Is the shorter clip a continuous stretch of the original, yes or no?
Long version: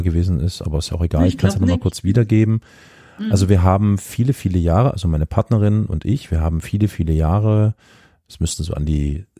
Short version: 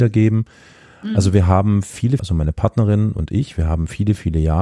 no